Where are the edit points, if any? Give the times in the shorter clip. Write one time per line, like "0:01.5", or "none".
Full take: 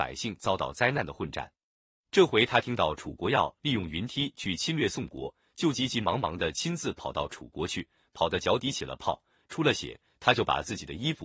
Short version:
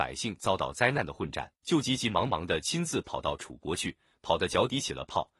0:01.6